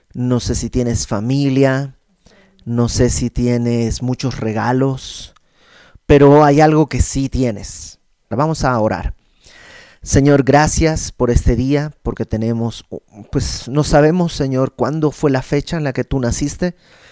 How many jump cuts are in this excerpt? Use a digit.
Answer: 1